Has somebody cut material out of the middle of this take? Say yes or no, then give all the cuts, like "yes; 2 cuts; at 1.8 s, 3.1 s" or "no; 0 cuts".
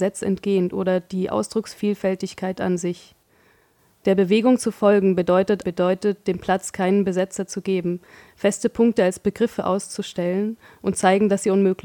yes; 1 cut; at 5.6 s